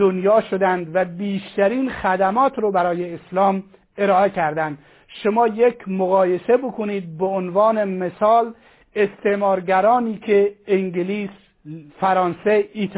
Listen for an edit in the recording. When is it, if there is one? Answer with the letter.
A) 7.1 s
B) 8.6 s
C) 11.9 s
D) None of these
C